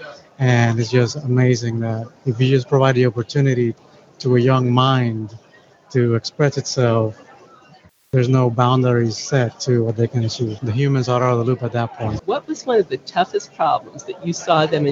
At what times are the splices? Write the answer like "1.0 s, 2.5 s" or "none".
2.2 s, 10.6 s, 12.2 s